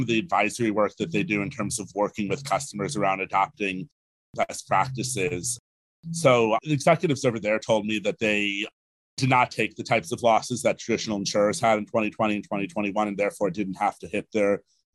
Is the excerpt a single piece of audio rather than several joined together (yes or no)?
yes